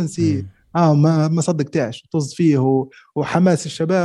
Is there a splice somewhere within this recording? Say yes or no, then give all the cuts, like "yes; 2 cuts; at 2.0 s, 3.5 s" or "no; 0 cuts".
yes; 1 cut; at 3.1 s